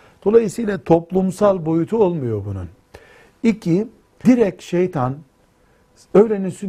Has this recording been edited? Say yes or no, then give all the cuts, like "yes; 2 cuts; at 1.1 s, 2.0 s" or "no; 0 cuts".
yes; 1 cut; at 4.2 s